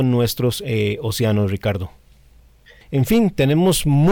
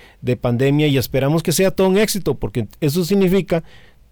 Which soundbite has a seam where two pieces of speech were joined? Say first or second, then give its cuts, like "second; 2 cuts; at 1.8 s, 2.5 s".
first; 1 cut; at 2.8 s